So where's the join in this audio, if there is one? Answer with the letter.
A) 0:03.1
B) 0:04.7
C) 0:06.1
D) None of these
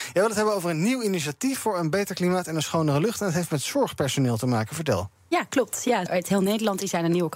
C